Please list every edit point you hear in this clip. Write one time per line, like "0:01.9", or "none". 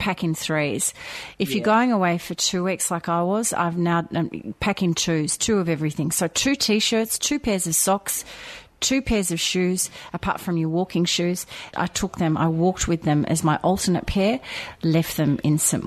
0:07.2
0:11.7